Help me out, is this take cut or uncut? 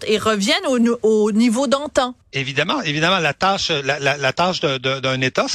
cut